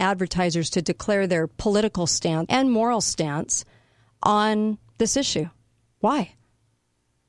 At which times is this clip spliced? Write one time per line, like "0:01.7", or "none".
0:02.5